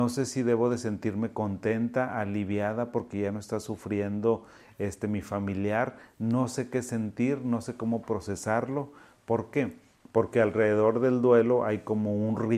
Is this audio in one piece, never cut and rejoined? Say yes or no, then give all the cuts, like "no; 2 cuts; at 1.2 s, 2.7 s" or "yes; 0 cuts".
yes; 0 cuts